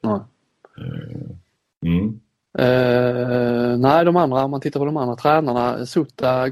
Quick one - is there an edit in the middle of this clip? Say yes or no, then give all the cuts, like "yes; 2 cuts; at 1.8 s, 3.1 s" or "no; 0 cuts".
no; 0 cuts